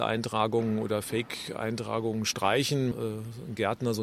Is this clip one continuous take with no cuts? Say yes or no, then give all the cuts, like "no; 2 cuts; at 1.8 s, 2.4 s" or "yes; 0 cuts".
no; 1 cut; at 2.9 s